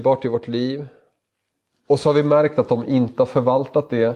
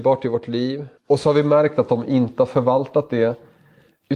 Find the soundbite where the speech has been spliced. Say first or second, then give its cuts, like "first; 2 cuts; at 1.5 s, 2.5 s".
second; 1 cut; at 1.0 s